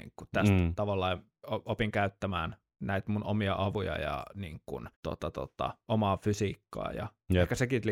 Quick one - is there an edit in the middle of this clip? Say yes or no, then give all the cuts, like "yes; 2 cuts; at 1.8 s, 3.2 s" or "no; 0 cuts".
yes; 1 cut; at 4.9 s